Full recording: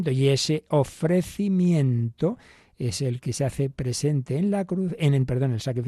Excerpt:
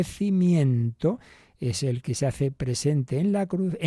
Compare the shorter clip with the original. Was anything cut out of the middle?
no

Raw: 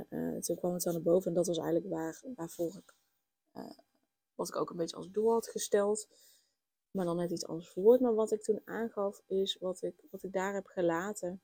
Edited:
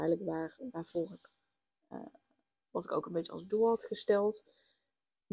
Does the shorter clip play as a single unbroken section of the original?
yes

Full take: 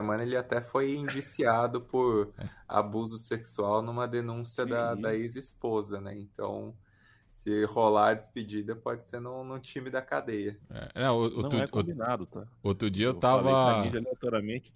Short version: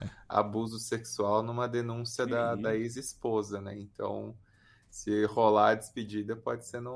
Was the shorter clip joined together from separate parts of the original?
no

